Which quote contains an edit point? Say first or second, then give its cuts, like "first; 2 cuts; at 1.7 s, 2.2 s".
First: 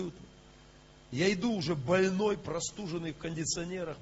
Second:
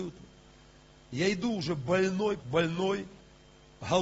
second; 1 cut; at 2.4 s